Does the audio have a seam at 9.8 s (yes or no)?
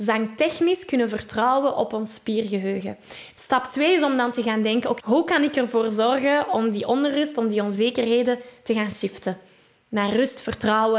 no